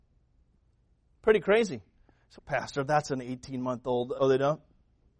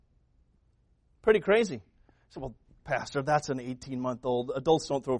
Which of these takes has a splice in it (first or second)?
first